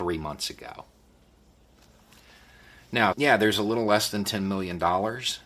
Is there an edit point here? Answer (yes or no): yes